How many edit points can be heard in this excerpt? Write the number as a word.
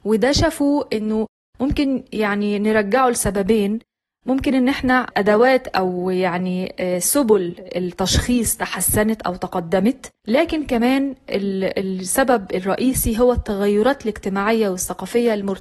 one